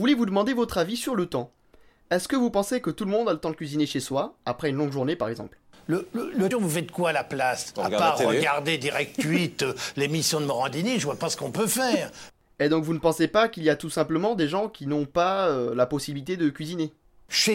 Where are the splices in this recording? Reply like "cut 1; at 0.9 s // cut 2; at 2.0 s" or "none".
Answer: cut 1; at 6.5 s